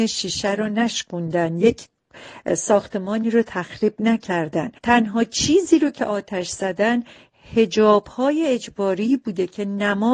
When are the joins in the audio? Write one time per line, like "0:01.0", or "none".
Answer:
0:04.8